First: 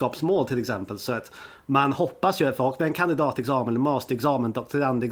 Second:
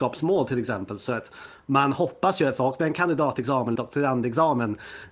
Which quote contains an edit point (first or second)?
second